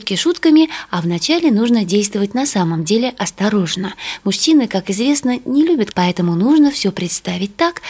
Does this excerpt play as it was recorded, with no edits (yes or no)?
no